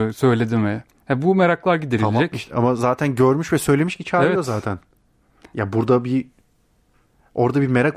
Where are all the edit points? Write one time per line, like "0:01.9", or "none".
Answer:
0:01.0